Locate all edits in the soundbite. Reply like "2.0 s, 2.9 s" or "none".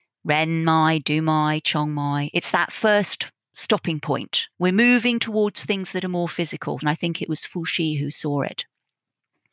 4.5 s, 6.8 s

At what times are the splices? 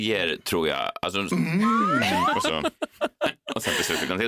1.3 s

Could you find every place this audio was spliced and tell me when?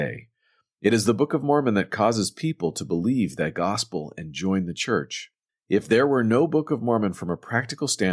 5.5 s

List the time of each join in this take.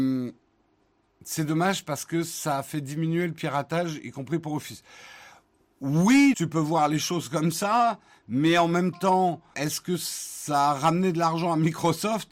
6.3 s, 9.5 s

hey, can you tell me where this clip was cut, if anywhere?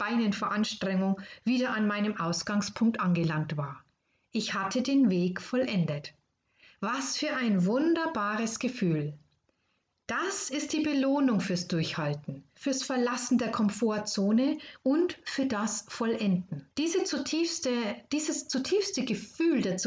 12.6 s, 16.7 s

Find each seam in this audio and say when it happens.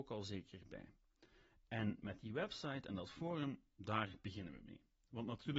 none

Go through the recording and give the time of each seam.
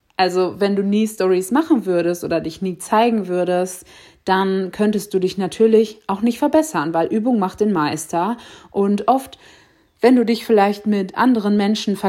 none

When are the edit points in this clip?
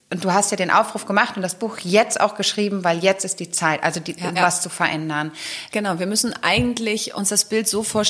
4.3 s, 5.7 s

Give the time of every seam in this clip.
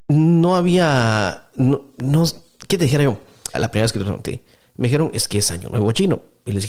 3.5 s

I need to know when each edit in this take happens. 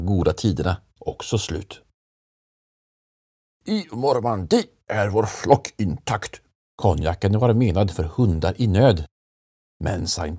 6.6 s

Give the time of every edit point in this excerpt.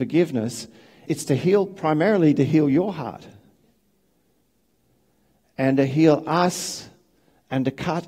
1.1 s

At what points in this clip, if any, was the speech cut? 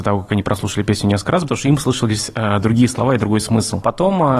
1.4 s

